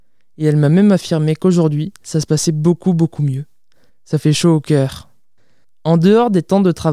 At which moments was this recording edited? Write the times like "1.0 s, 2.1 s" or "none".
none